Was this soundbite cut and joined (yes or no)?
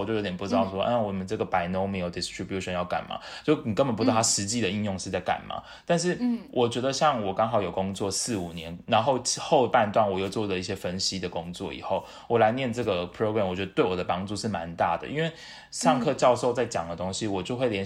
no